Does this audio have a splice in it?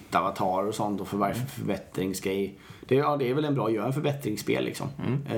no; 0 cuts

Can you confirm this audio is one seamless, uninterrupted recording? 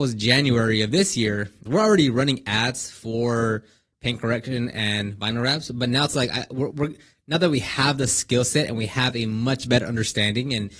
no; 2 cuts; at 1.7 s, 6.7 s

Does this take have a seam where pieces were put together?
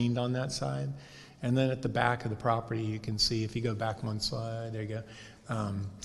no; 0 cuts

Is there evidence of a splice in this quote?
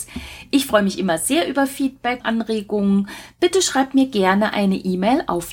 yes; 1 cut; at 2.2 s

